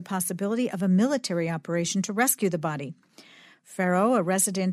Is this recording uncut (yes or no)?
yes